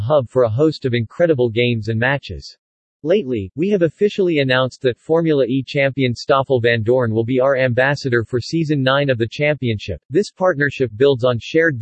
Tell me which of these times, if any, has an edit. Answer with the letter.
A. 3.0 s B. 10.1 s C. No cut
A